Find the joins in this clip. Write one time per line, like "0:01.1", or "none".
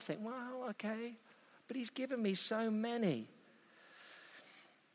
none